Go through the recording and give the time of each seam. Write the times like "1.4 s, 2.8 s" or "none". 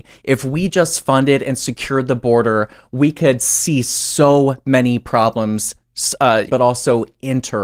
6.5 s